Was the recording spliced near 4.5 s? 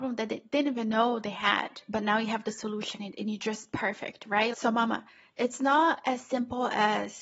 yes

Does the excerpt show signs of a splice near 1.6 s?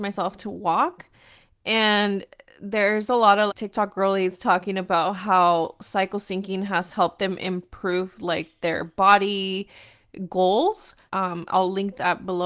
no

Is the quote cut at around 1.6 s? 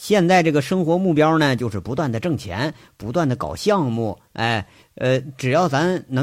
no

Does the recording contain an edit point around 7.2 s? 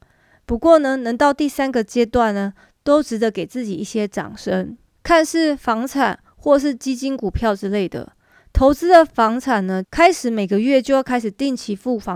no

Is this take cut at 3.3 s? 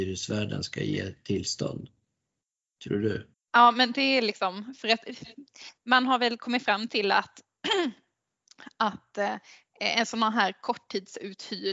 yes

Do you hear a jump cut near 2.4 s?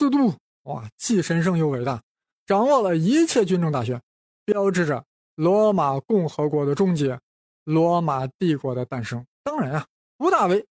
no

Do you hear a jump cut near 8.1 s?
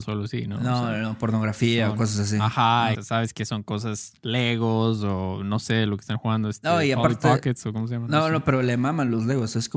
no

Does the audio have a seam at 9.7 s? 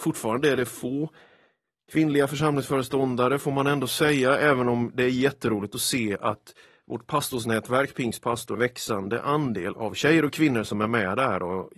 yes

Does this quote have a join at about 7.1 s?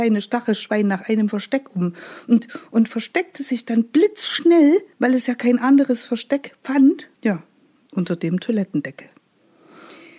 yes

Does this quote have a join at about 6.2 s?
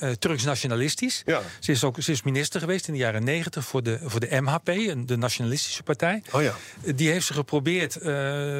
no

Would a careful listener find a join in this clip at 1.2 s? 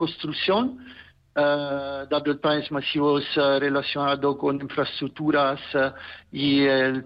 no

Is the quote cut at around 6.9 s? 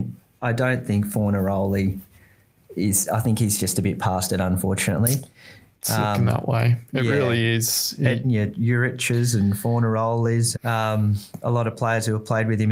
no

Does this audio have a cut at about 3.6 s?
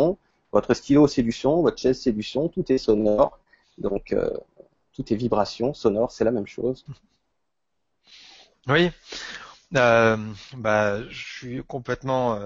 no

